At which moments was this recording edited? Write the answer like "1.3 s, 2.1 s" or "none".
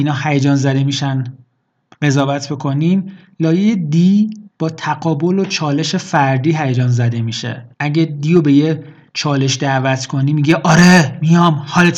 4.5 s, 7.7 s

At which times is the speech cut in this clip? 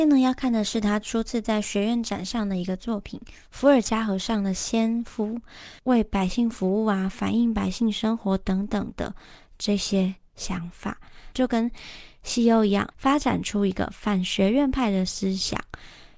5.8 s, 11.3 s, 12.9 s

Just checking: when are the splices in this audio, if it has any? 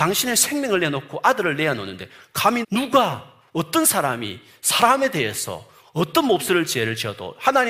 2.6 s

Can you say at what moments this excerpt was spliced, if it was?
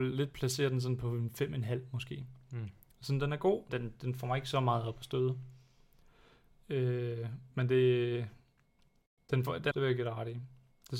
3.7 s, 9.7 s

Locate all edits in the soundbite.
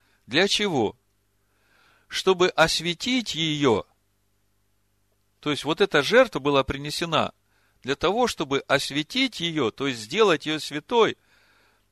none

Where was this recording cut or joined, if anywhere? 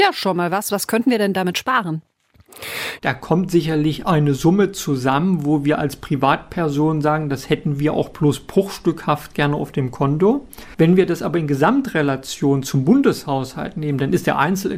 3.0 s

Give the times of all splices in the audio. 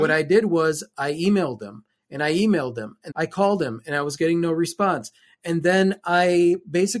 3.1 s

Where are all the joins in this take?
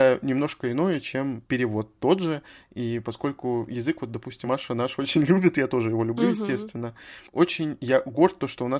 none

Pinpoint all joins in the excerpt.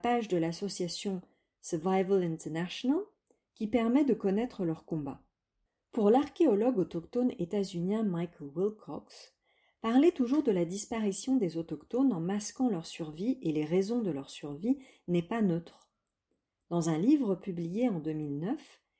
none

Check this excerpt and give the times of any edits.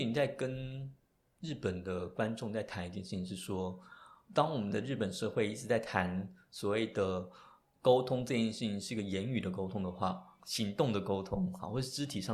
10.4 s

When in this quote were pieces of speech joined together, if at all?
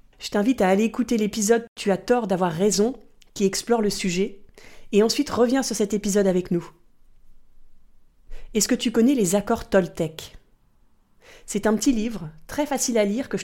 none

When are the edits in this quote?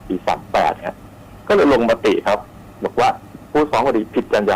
none

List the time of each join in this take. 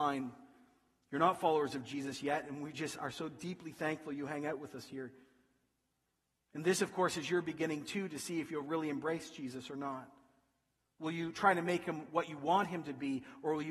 none

